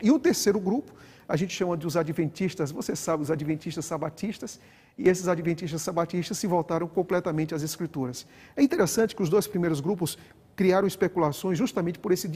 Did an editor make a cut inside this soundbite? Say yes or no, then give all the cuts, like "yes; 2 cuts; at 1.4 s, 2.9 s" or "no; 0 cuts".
no; 0 cuts